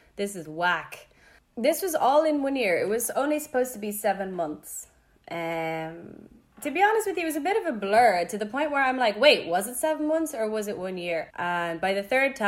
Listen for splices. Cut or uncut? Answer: cut